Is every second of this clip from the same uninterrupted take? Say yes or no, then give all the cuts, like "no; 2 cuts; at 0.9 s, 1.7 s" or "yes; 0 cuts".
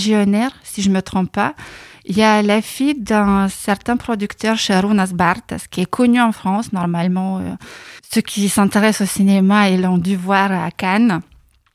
no; 1 cut; at 8.0 s